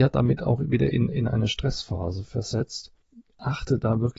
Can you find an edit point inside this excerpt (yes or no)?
no